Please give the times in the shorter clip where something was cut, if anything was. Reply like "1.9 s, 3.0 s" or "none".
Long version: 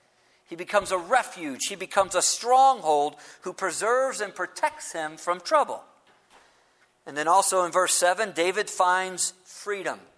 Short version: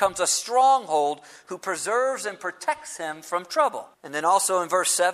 3.9 s